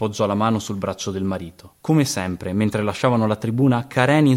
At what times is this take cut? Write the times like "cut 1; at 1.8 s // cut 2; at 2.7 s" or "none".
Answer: cut 1; at 1.8 s